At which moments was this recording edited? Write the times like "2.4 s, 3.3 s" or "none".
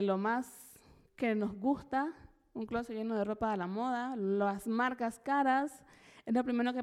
1.1 s